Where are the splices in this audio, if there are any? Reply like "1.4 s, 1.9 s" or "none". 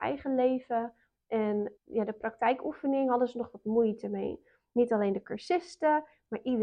1.8 s, 4.7 s